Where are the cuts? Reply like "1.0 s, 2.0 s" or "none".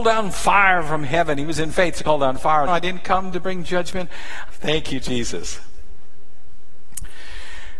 2.7 s, 4.5 s